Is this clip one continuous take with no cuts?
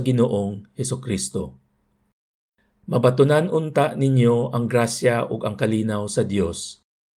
yes; 0 cuts

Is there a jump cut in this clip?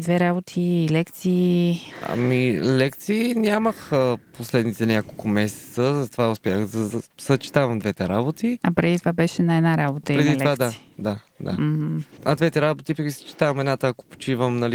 yes; 1 cut; at 13.0 s

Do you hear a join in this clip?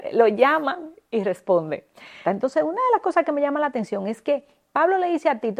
yes; 1 cut; at 2.2 s

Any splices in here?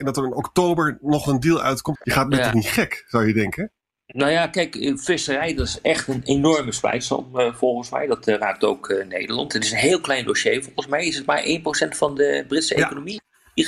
yes; 1 cut; at 1.9 s

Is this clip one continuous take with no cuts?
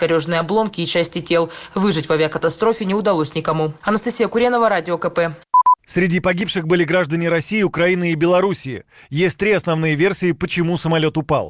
yes; 0 cuts

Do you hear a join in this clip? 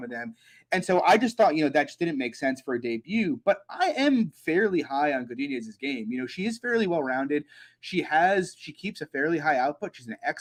no; 0 cuts

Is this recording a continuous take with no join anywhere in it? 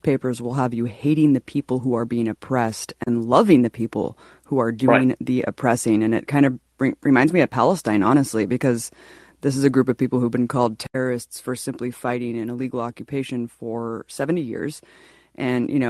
yes; 0 cuts

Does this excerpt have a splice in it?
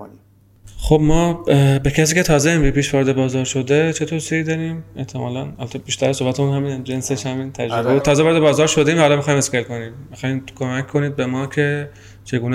yes; 1 cut; at 8.0 s

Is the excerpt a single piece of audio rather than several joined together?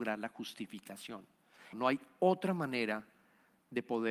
no; 1 cut; at 1.7 s

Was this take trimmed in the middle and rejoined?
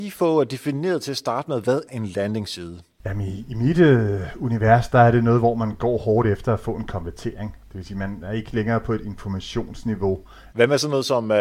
yes; 2 cuts; at 1.9 s, 10.5 s

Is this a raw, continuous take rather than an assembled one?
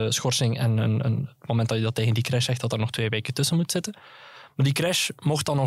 yes; 0 cuts

